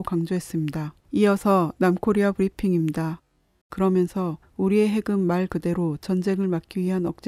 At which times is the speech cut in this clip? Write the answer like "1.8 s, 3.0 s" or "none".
1.0 s, 3.6 s